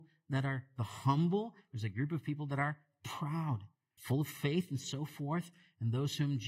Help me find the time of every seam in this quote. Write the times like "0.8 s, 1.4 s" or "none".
4.0 s

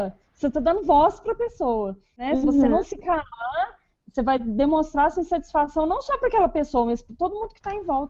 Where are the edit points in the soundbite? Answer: none

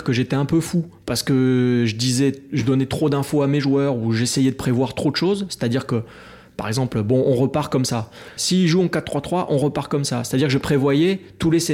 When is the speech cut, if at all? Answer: 8.4 s

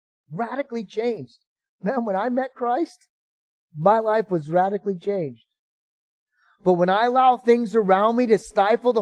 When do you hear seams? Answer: none

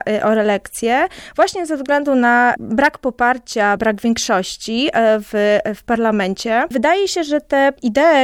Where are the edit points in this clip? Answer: 3.8 s, 6.7 s

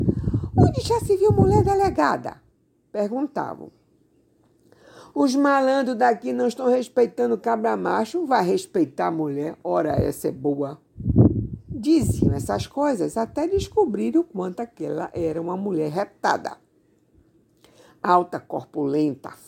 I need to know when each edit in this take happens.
none

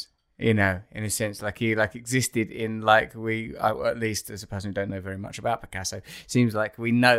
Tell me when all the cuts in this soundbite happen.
none

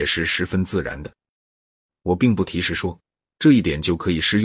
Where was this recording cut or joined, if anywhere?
1.9 s

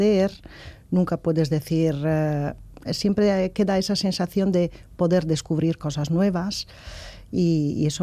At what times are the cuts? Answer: 2.8 s

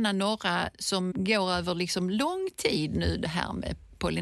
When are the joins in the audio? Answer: 1.1 s

